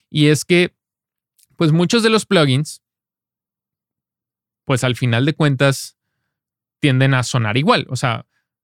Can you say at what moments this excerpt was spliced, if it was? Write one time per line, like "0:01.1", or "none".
none